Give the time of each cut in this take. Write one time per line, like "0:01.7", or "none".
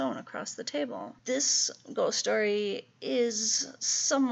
0:01.2